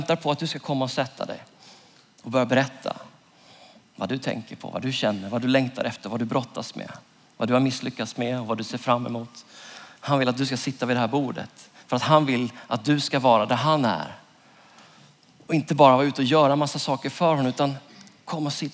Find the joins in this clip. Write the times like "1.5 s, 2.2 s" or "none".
none

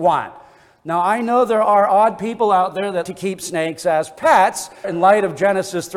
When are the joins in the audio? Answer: 3.0 s, 4.8 s

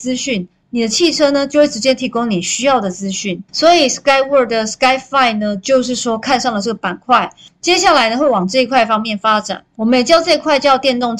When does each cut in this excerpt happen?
3.5 s

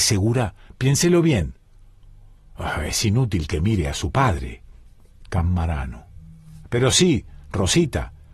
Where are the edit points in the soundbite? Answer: none

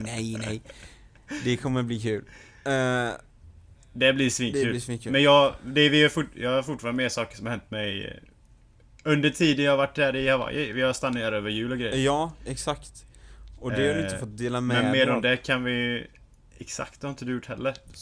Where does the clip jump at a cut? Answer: none

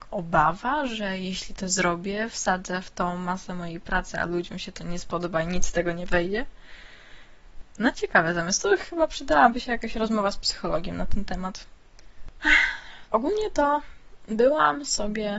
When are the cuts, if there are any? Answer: 7.9 s, 13.1 s

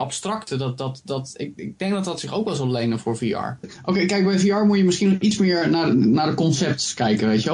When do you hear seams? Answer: 3.6 s

